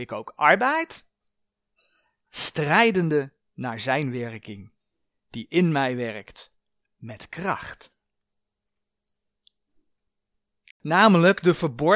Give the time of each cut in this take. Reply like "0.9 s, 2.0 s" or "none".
10.7 s